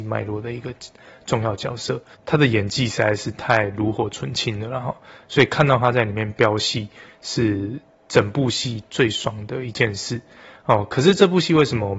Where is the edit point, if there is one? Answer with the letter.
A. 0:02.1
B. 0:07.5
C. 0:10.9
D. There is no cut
A